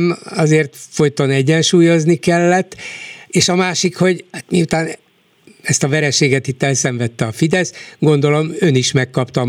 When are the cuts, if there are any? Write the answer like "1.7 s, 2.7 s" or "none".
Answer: none